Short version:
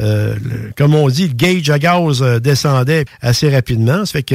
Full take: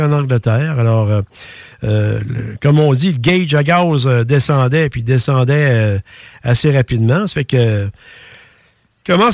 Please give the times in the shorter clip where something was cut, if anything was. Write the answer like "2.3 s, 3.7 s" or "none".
3.1 s